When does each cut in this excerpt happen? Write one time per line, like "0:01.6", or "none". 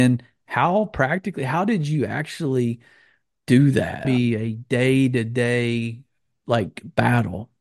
0:04.0